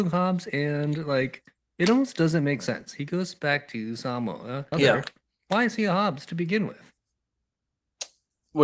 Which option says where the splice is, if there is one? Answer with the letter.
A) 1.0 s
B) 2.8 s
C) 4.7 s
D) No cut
C